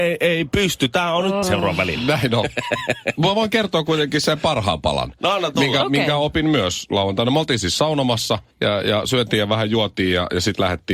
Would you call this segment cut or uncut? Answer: cut